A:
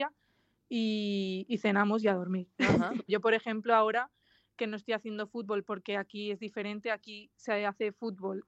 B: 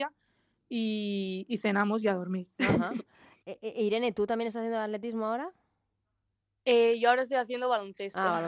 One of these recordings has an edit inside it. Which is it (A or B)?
A